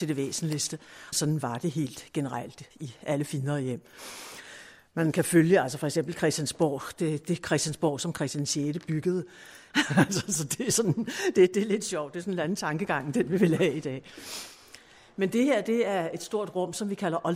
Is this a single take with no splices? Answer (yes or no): no